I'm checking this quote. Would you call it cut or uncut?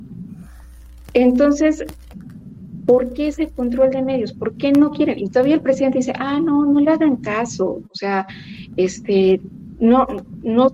uncut